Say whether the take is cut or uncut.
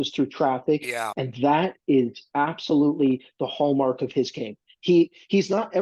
cut